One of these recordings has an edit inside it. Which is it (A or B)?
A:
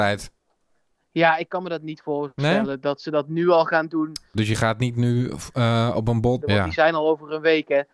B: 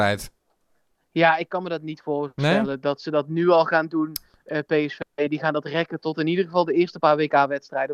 A